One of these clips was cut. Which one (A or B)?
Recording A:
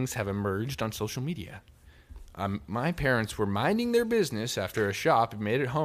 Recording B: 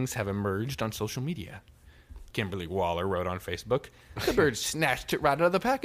B